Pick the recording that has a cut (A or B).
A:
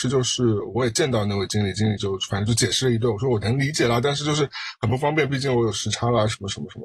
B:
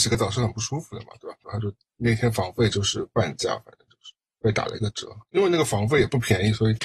B